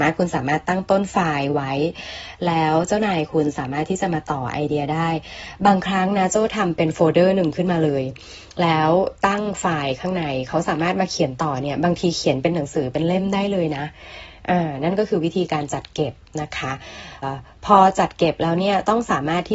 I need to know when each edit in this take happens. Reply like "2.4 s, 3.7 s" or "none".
17.2 s